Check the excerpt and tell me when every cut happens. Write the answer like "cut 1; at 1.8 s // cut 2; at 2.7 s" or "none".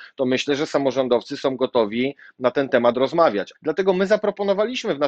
cut 1; at 3.5 s